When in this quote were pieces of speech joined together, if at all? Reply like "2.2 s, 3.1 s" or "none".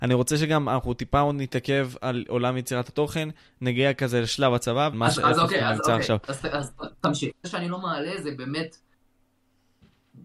4.9 s, 7.3 s